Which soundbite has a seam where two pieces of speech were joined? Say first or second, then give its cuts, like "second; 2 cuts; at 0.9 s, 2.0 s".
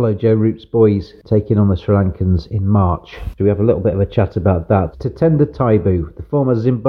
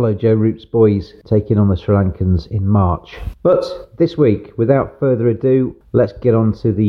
first; 2 cuts; at 3.4 s, 4.9 s